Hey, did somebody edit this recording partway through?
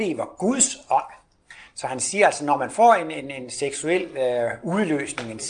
no; 0 cuts

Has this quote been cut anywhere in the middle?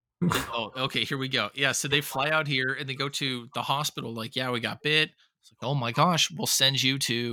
no; 0 cuts

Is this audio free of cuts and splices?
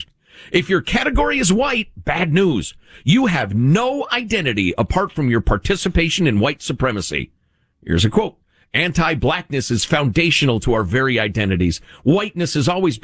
yes; 0 cuts

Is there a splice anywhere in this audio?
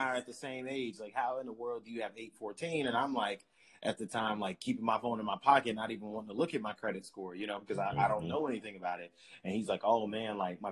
no; 0 cuts

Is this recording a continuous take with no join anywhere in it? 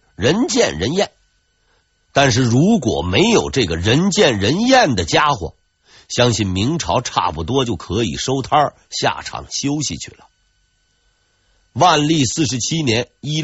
yes; 0 cuts

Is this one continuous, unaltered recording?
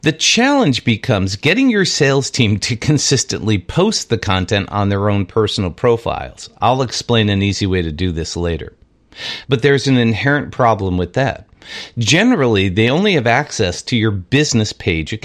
no; 1 cut; at 9.4 s

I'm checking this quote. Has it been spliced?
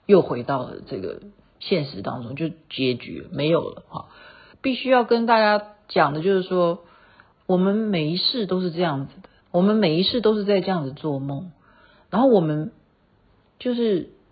yes; 3 cuts; at 4.5 s, 7.3 s, 9.4 s

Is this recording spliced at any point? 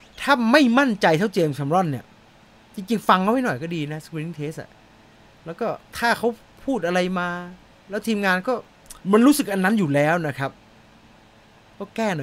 yes; 2 cuts; at 5.9 s, 9.0 s

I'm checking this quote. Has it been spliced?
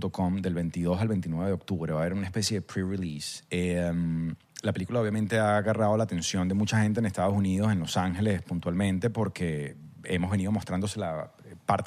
no; 0 cuts

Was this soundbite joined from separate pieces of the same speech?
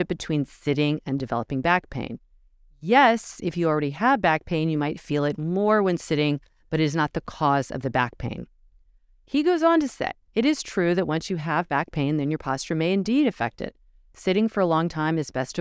yes; 1 cut; at 10.3 s

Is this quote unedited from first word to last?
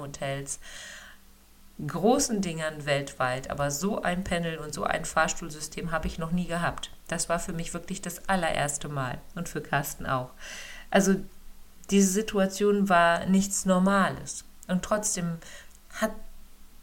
yes; 0 cuts

